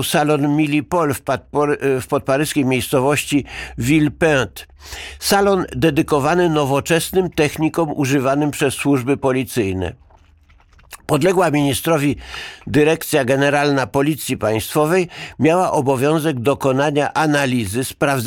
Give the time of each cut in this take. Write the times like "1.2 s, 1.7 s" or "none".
none